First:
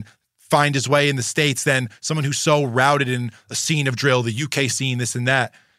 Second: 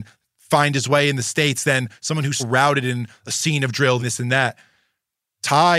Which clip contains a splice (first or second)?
second